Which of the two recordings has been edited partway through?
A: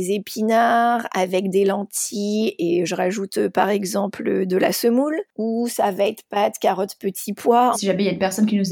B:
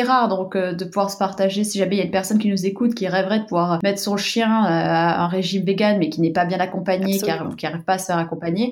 A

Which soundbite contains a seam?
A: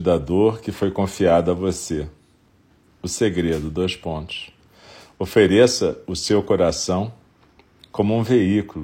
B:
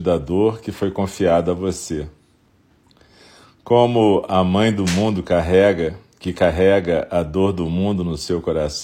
A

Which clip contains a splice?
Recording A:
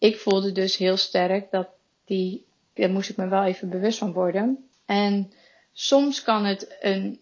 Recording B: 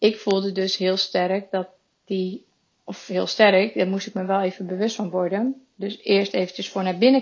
A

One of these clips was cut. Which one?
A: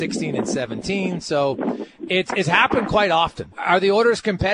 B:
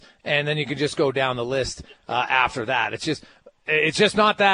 A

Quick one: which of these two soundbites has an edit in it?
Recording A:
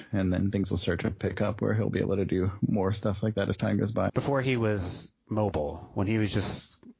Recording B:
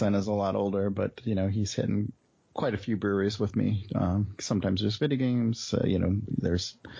A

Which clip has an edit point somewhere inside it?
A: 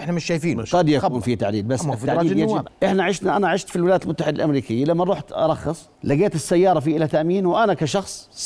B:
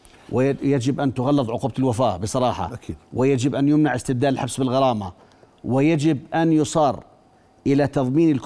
A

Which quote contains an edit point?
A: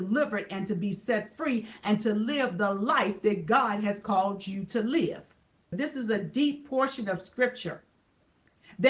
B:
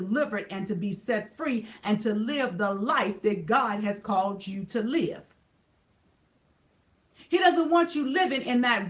A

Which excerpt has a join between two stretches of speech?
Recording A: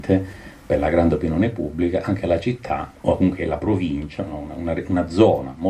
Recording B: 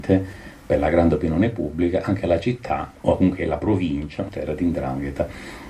B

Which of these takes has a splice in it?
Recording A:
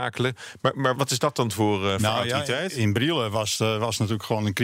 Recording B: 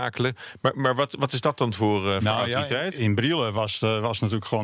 A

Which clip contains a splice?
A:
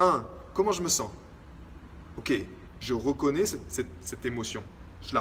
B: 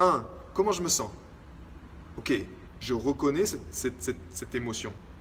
A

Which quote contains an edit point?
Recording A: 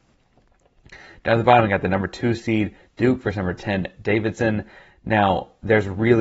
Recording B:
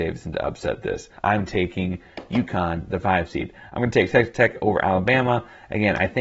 B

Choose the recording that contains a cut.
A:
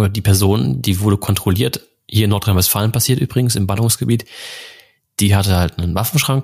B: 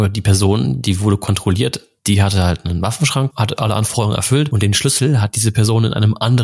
B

